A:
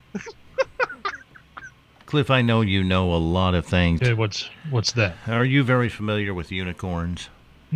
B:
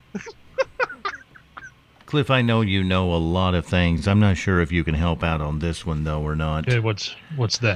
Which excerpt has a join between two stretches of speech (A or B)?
A